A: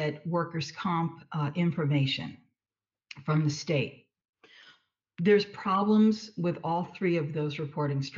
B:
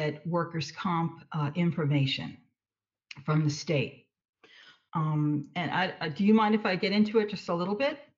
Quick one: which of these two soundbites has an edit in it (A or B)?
B